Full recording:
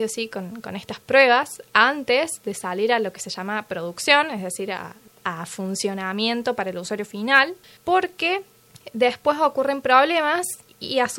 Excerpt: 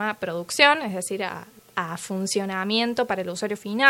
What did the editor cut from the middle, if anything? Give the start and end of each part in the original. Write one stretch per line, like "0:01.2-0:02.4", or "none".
none